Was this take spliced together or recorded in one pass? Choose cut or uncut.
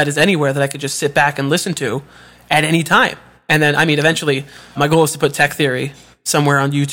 cut